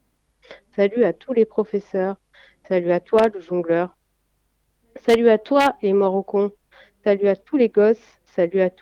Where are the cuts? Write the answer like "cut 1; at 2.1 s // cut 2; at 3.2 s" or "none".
none

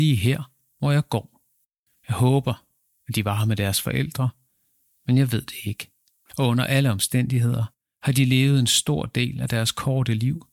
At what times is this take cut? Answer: none

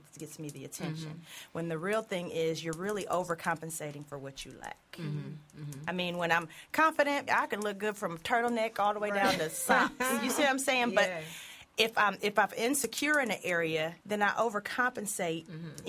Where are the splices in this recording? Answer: cut 1; at 7.3 s // cut 2; at 14.0 s

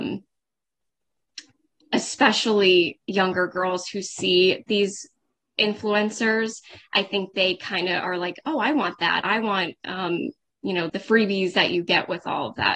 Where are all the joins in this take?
cut 1; at 9.2 s // cut 2; at 10.9 s

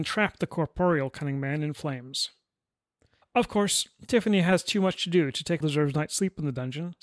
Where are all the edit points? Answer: cut 1; at 3.2 s // cut 2; at 5.6 s

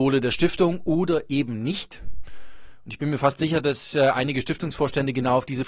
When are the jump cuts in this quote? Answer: none

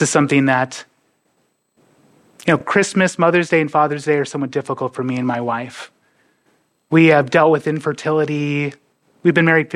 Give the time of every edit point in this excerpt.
none

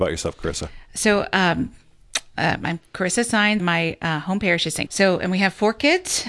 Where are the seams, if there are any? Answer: cut 1; at 3.6 s // cut 2; at 4.9 s

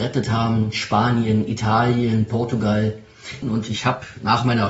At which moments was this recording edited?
cut 1; at 3.4 s

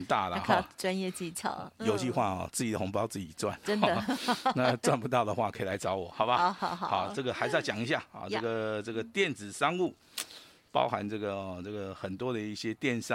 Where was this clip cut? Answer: none

